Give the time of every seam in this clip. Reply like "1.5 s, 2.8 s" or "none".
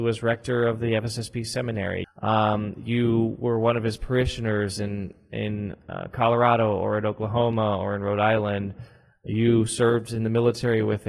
2.0 s